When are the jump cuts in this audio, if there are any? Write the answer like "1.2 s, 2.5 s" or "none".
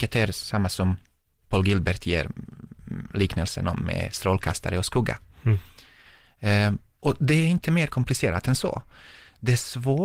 none